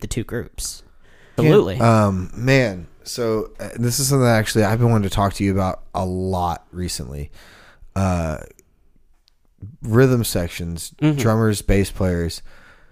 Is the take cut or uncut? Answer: cut